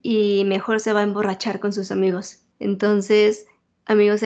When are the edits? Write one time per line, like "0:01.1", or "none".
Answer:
0:02.5